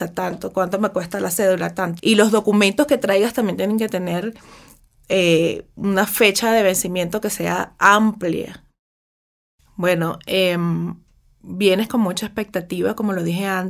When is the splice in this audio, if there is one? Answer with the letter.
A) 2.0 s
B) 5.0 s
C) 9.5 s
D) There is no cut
A